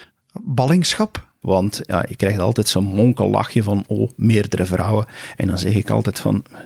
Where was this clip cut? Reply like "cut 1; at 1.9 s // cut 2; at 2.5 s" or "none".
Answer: cut 1; at 1.4 s